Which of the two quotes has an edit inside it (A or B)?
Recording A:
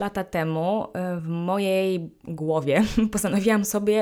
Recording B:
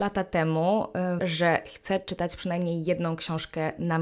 B